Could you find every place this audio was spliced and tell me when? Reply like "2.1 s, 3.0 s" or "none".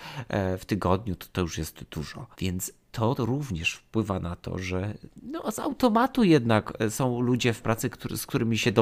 2.3 s